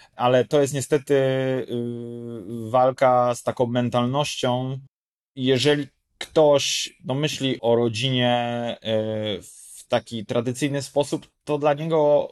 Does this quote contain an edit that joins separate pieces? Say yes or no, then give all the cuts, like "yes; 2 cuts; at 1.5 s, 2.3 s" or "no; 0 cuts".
no; 0 cuts